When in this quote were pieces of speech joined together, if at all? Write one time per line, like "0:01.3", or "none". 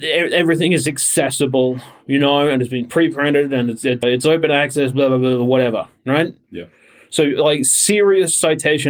0:04.0
0:06.4